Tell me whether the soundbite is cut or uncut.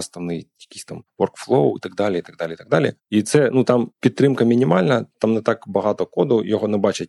uncut